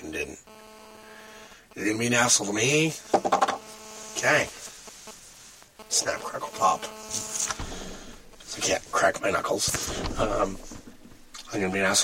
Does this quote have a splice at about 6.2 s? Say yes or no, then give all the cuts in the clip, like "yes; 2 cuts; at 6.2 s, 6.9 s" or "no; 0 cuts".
no; 0 cuts